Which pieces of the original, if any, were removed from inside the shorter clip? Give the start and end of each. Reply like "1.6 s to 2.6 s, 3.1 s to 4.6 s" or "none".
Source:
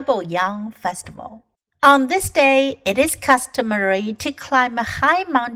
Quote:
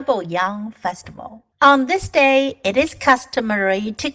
1.5 s to 1.7 s